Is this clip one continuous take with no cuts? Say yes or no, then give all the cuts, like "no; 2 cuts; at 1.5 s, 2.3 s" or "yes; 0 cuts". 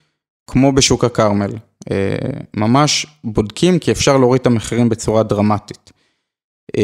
yes; 0 cuts